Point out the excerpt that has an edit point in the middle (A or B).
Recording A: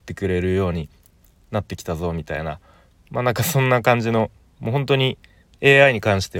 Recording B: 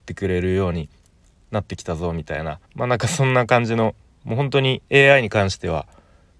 B